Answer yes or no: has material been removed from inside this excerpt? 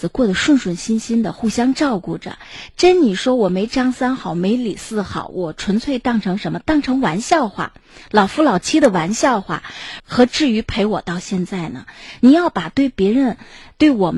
yes